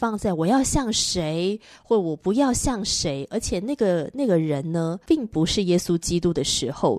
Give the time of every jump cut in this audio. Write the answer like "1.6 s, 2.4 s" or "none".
5.0 s